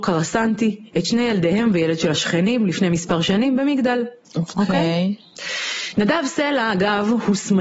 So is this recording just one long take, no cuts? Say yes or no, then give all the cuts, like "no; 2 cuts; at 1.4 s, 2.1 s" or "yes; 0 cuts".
no; 1 cut; at 4.2 s